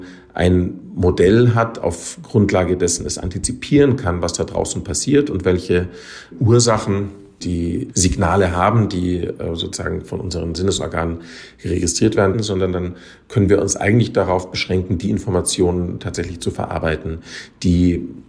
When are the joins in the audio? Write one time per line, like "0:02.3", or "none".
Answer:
0:12.3